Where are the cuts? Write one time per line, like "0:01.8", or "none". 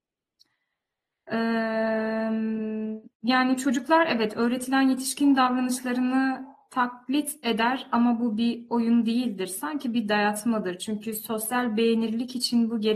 0:03.1